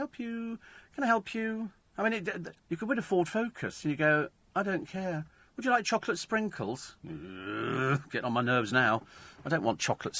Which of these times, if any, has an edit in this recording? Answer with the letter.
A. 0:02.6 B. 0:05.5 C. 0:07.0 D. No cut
A